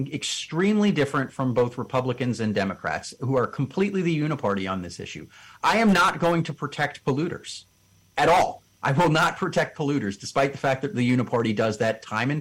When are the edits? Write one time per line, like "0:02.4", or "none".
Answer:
none